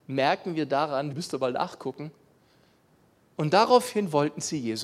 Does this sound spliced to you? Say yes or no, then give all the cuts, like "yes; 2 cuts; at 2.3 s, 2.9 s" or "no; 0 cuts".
yes; 1 cut; at 1.1 s